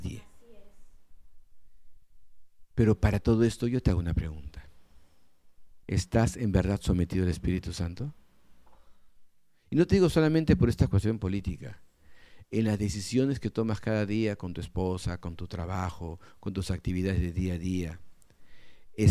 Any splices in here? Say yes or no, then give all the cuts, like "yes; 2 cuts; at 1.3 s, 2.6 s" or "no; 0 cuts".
yes; 1 cut; at 5.8 s